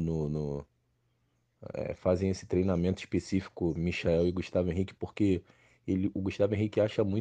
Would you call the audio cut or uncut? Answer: uncut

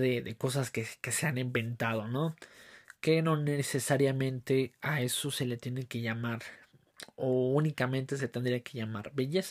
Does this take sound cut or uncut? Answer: uncut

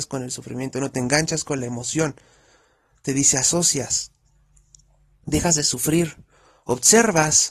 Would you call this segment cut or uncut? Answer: uncut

